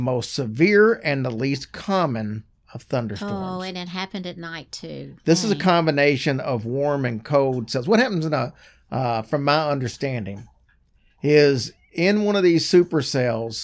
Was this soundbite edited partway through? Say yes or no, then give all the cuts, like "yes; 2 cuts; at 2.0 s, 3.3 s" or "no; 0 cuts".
no; 0 cuts